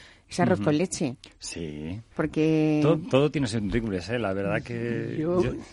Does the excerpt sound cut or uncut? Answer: cut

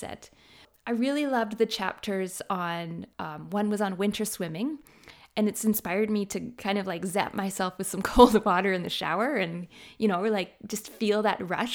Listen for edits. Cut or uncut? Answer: cut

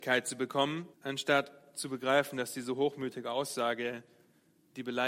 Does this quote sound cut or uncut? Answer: cut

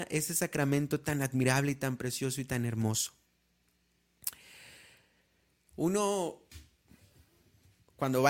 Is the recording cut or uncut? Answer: uncut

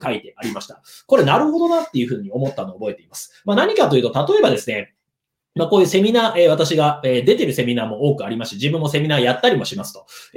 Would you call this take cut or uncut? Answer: uncut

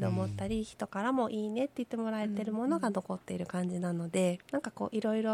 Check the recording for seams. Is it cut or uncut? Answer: cut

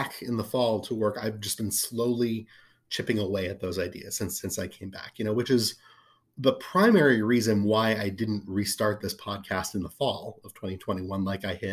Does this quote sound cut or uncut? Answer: uncut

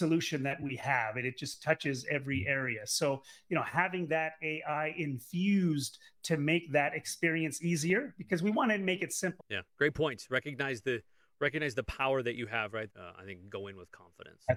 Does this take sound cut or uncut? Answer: cut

